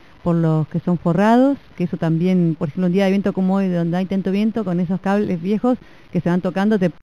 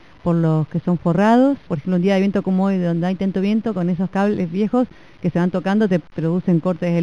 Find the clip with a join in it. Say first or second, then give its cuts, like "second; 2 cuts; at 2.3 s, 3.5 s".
second; 1 cut; at 1.7 s